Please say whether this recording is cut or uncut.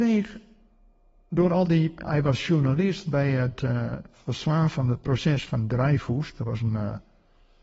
uncut